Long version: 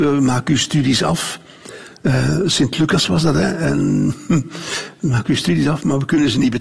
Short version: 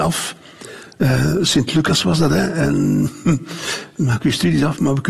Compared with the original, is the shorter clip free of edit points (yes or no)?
yes